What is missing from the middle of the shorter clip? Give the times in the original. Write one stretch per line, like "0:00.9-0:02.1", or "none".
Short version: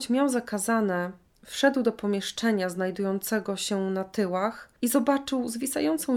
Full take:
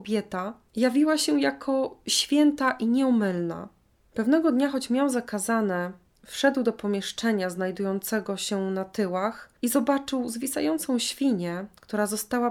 none